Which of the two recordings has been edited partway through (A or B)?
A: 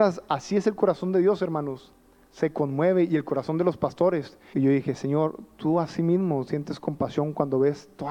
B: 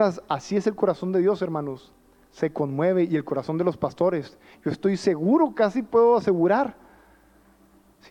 A